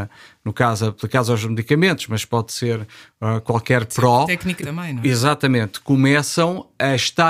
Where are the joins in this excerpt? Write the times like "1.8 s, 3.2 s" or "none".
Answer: 4.6 s